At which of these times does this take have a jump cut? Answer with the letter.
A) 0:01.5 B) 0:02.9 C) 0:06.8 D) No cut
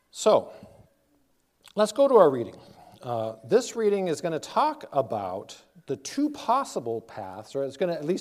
D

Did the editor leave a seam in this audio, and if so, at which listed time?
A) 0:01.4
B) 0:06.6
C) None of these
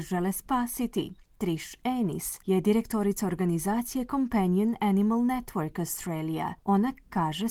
B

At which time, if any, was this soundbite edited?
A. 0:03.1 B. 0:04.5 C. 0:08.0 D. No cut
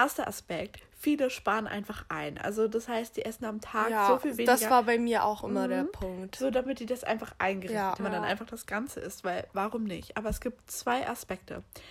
C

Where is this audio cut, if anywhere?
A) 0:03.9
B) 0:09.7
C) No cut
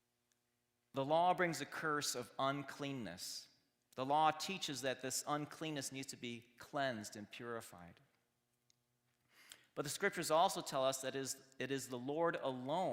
C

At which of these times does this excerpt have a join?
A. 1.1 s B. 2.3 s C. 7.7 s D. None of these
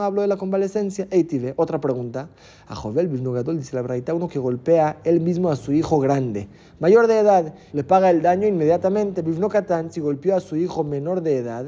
C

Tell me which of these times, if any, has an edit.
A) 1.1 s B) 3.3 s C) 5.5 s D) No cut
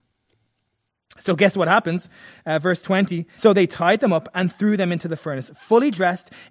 B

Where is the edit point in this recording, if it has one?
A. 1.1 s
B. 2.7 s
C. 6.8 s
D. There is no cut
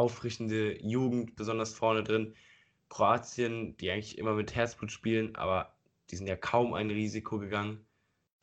D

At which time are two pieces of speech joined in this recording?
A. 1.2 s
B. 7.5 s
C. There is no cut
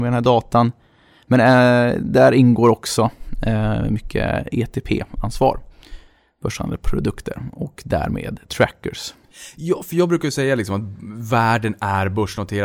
B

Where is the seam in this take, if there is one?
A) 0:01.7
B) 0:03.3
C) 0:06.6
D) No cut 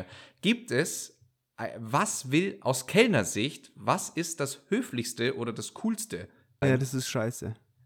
C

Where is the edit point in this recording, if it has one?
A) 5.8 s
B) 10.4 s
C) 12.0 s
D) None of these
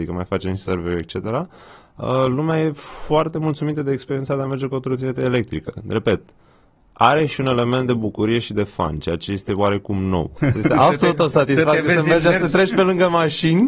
B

